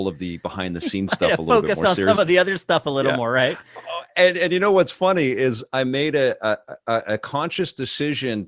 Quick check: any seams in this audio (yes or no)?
no